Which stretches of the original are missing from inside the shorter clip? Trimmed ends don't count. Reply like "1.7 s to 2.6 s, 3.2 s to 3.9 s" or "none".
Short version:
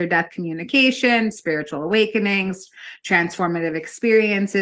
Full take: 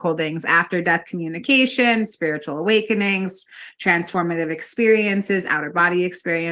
none